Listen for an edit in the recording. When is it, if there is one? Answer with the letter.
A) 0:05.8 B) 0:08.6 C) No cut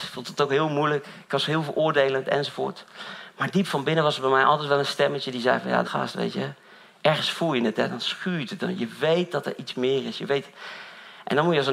A